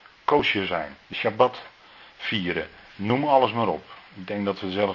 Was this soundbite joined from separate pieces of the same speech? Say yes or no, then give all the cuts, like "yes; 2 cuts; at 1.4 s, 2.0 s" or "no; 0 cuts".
yes; 1 cut; at 1.0 s